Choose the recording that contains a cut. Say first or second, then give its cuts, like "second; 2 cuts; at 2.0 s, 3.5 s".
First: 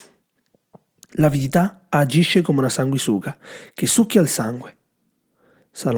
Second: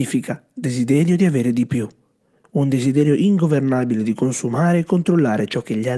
second; 1 cut; at 2.4 s